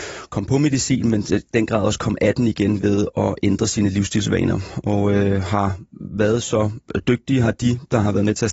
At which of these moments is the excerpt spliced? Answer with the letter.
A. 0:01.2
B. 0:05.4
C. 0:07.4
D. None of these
D